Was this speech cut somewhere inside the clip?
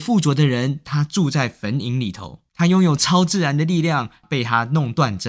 yes; 2 cuts; at 2.5 s, 4.2 s

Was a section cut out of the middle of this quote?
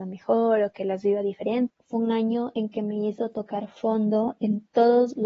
yes; 1 cut; at 1.7 s

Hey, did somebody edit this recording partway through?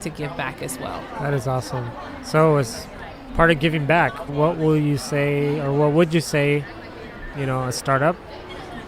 yes; 2 cuts; at 4.3 s, 7.3 s

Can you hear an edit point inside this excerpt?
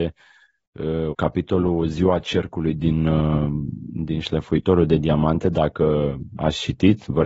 yes; 1 cut; at 1.1 s

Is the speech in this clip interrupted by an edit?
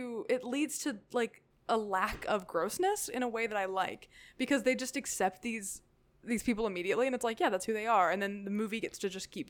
no; 0 cuts

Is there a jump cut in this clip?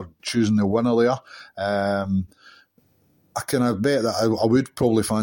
no; 0 cuts

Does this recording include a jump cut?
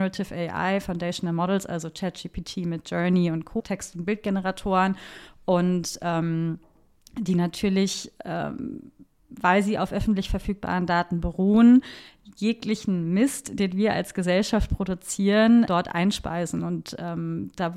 yes; 2 cuts; at 3.6 s, 15.7 s

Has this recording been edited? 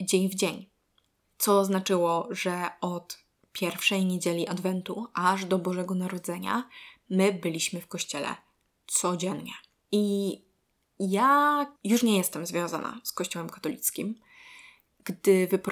yes; 2 cuts; at 9.8 s, 11.8 s

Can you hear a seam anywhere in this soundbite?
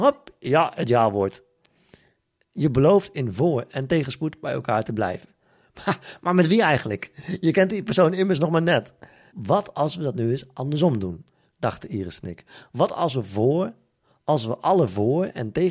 yes; 1 cut; at 9.3 s

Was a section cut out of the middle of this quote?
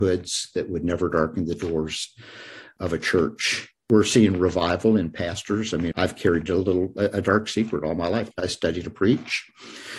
yes; 2 cuts; at 5.9 s, 8.3 s

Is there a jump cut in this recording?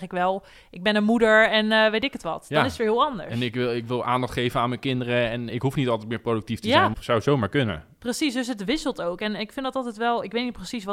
yes; 2 cuts; at 5.5 s, 6.9 s

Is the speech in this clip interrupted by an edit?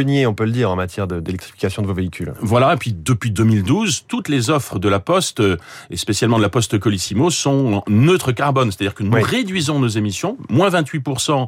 no; 0 cuts

